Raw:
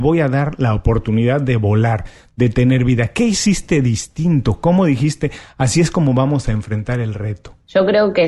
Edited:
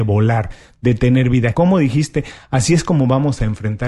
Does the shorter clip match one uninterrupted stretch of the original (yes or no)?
no